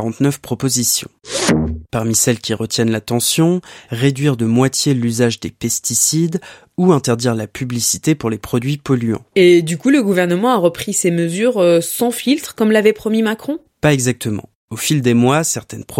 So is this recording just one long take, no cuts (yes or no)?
no